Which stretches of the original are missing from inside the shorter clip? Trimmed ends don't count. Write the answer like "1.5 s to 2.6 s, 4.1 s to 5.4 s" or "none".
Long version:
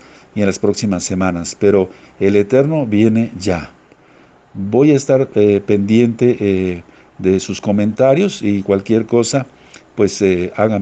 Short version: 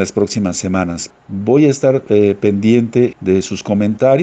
1.6 s to 4.4 s, 6.4 s to 7.1 s